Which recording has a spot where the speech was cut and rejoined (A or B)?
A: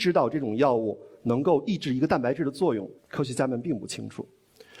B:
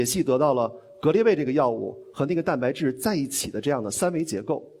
A